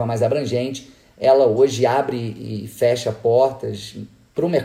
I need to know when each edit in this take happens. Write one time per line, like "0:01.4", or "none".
none